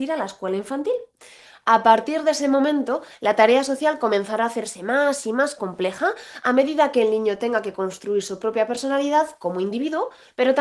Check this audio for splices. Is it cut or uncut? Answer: uncut